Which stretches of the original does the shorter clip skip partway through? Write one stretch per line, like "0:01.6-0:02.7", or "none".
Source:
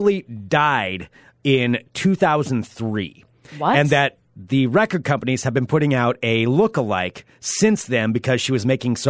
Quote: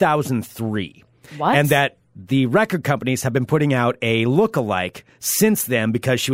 none